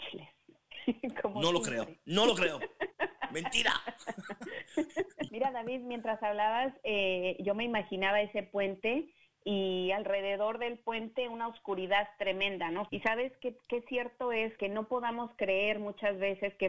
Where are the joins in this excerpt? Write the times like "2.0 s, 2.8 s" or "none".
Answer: 5.3 s, 12.9 s, 14.6 s